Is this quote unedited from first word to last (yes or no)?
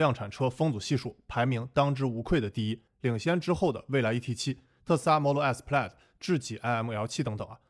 yes